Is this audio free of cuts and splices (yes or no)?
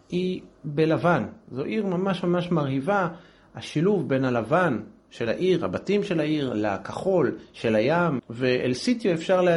no